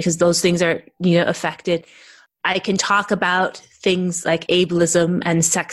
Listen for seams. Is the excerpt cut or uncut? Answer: uncut